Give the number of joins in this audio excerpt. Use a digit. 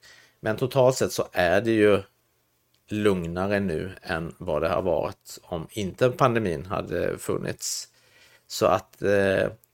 0